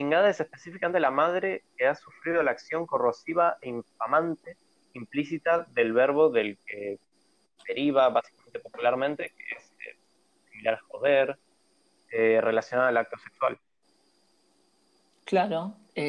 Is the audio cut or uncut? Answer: uncut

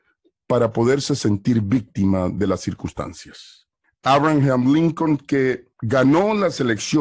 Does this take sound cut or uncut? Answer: cut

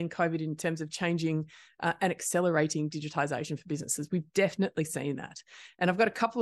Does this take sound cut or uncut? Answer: uncut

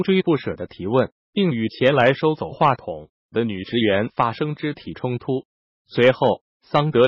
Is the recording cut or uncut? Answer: cut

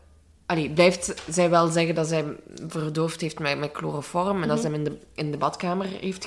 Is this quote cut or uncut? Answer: uncut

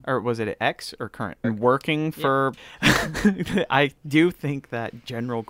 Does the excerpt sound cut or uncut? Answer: cut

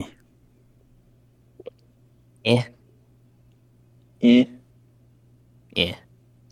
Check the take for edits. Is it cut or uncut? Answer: uncut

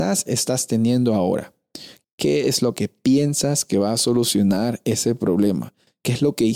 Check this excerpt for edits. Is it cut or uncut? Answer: cut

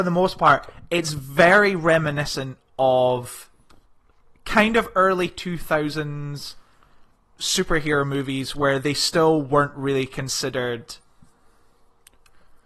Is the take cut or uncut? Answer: uncut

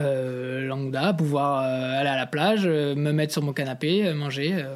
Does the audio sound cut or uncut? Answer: uncut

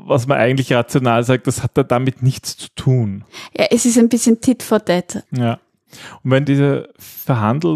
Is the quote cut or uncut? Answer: cut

